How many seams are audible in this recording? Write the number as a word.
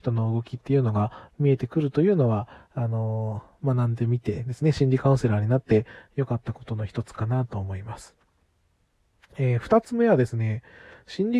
zero